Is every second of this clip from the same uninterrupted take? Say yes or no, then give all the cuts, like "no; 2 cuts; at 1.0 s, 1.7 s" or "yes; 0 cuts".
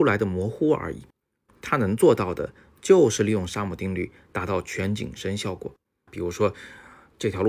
no; 2 cuts; at 1.5 s, 6.1 s